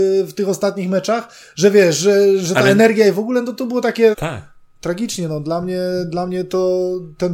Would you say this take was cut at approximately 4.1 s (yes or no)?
yes